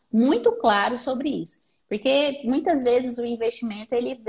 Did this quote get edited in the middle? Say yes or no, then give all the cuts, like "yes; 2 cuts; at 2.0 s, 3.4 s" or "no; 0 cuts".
yes; 1 cut; at 1.8 s